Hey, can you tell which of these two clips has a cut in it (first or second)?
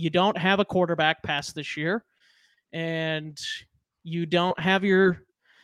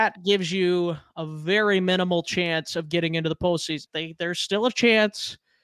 second